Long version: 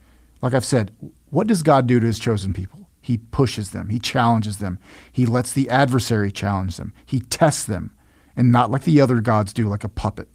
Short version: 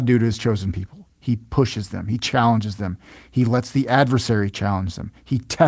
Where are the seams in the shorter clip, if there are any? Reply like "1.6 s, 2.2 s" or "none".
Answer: none